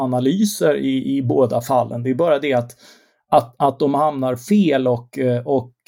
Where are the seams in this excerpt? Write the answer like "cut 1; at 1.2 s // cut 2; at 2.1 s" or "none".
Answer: none